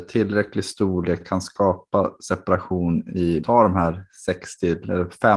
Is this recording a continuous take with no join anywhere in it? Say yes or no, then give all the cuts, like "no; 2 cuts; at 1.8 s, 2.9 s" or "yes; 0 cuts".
no; 2 cuts; at 1.2 s, 3.4 s